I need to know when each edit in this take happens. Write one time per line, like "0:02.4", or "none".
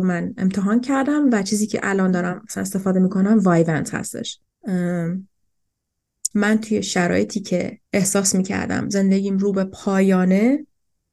0:04.4
0:06.3
0:07.9